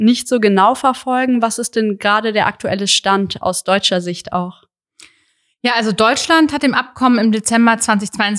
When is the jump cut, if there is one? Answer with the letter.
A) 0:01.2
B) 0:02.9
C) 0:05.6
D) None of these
D